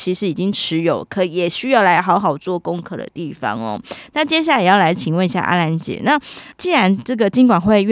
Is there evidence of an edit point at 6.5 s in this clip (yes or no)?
yes